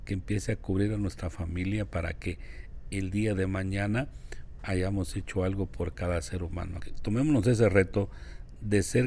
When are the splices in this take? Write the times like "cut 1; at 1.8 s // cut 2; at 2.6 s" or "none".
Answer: cut 1; at 4.6 s // cut 2; at 6.8 s